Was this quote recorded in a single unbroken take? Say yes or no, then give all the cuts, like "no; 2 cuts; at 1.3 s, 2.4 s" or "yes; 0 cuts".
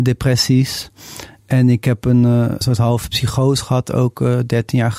no; 1 cut; at 2.6 s